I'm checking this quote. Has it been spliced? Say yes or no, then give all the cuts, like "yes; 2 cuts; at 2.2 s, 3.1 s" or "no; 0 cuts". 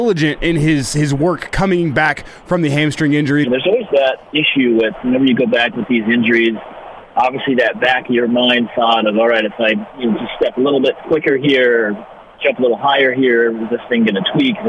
yes; 1 cut; at 3.4 s